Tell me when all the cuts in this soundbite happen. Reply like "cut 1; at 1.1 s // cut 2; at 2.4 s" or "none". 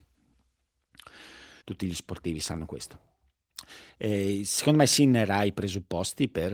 cut 1; at 1.6 s